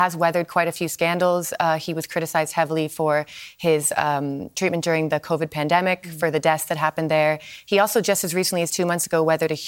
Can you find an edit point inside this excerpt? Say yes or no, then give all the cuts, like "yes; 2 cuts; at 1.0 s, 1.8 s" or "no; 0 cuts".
no; 0 cuts